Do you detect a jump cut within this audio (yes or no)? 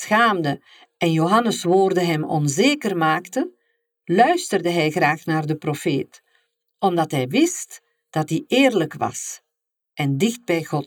no